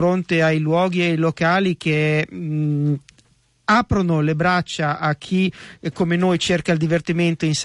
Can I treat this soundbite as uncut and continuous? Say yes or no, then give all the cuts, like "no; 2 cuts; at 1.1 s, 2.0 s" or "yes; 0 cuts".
yes; 0 cuts